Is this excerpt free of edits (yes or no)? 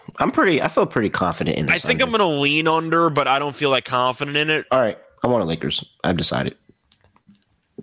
no